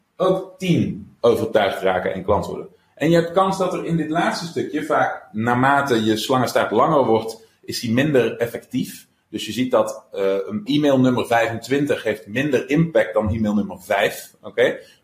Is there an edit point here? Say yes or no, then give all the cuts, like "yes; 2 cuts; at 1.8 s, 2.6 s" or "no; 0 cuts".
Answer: yes; 1 cut; at 10.7 s